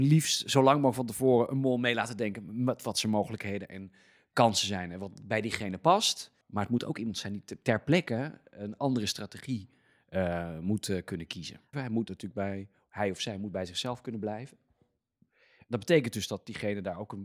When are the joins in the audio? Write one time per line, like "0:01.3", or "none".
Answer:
0:06.4
0:11.7